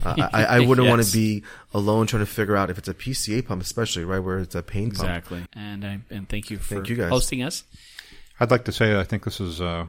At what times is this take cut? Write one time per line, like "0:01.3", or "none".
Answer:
0:05.5